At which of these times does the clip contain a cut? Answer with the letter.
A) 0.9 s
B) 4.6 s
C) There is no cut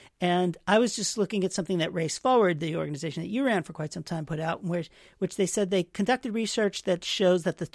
C